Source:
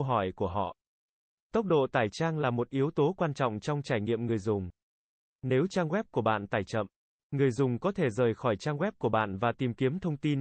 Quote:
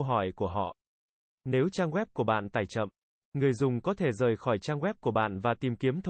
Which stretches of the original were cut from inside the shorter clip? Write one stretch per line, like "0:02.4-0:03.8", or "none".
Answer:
0:01.4-0:05.3